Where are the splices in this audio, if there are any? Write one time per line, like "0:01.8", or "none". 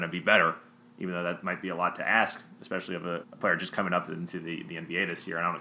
0:03.2